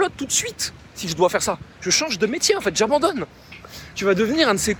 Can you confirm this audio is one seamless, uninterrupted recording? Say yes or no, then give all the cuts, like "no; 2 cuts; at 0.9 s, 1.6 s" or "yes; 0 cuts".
no; 1 cut; at 1.7 s